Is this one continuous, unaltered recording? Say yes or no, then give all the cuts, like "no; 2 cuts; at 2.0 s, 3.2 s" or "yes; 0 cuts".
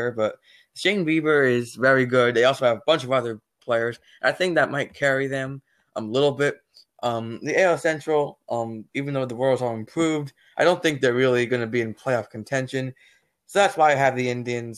no; 1 cut; at 8.9 s